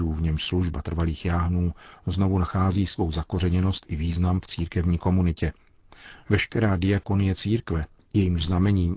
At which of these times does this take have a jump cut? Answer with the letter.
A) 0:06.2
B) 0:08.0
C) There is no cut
C